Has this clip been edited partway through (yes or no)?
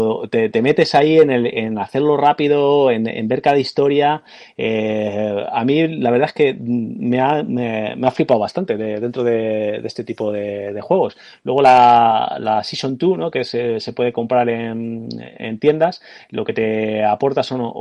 no